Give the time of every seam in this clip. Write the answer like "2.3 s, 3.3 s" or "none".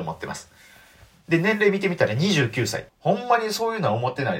2.9 s